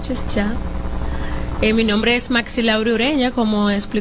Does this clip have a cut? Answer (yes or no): no